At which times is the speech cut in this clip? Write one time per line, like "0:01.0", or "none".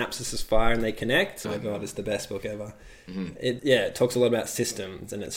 0:01.4
0:03.6